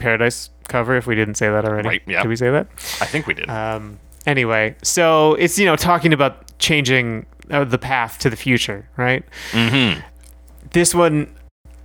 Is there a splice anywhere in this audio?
no; 0 cuts

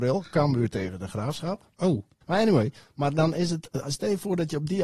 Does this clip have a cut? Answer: yes; 1 cut; at 2.2 s

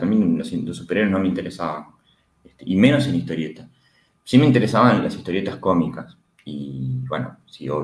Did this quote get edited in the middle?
no; 0 cuts

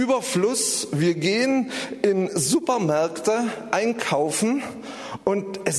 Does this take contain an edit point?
no; 0 cuts

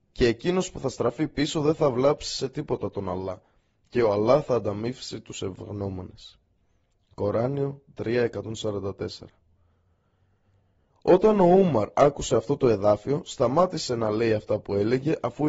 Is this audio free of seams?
yes; 0 cuts

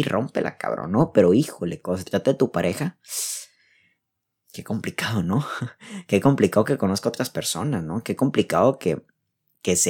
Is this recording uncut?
yes; 0 cuts

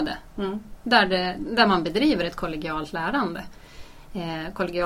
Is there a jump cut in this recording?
no; 0 cuts

